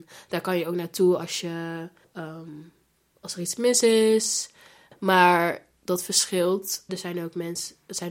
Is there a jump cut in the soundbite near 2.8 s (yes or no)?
no